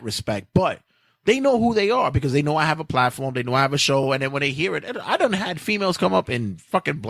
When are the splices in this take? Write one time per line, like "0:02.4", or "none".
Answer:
none